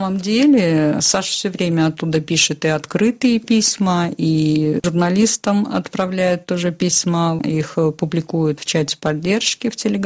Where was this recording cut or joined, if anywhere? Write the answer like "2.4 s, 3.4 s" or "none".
none